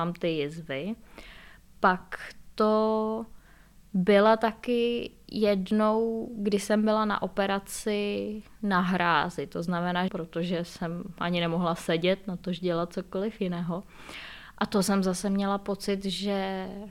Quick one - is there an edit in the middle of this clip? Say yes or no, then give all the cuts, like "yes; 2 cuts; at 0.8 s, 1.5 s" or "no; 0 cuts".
yes; 1 cut; at 10.1 s